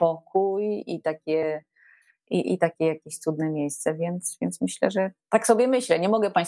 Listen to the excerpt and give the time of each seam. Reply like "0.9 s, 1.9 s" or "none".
none

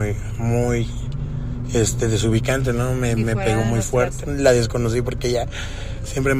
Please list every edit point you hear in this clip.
4.2 s

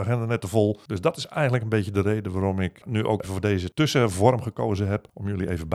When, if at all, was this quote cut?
3.2 s

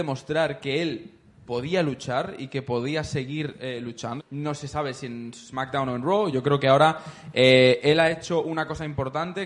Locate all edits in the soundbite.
4.2 s, 6.3 s

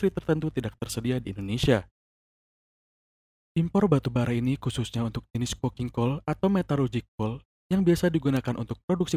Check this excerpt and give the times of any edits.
none

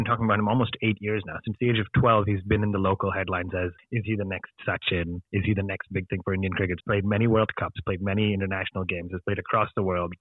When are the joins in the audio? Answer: 6.8 s

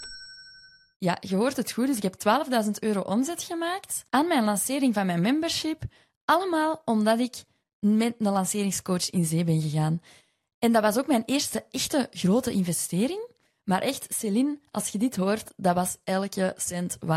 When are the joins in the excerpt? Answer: none

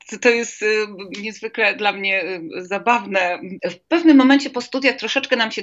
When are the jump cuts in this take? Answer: 3.6 s

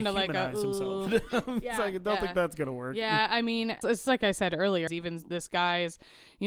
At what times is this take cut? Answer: 1.1 s, 3.8 s, 4.9 s

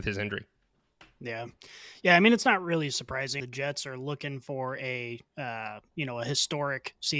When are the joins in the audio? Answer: 3.4 s

